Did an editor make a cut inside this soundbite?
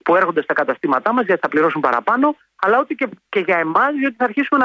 no; 0 cuts

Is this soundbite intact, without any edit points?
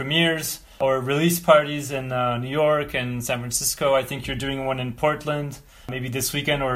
yes; 0 cuts

